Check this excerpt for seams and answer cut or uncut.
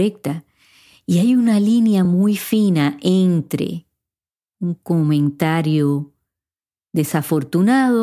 uncut